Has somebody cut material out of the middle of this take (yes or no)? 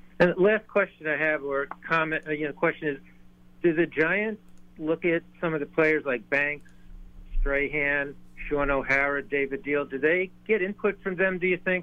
no